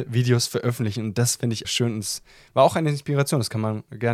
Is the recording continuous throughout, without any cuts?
no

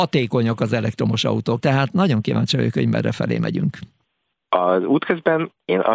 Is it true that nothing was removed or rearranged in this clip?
no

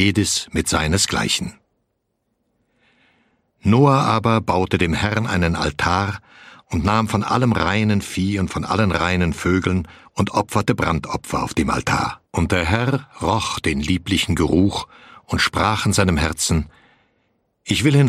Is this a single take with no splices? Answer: no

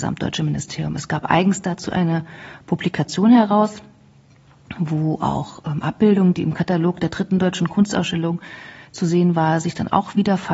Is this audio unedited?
yes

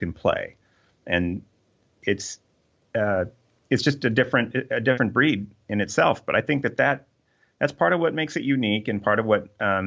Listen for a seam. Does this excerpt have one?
no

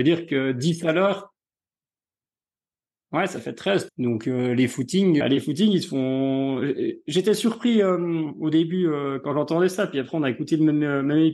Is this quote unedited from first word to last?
no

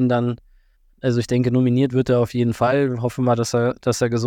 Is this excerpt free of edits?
yes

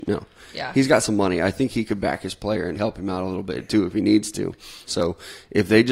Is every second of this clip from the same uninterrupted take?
no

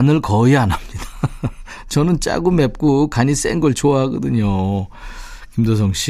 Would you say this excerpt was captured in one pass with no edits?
yes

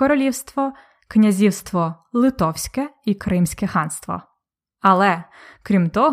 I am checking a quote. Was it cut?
no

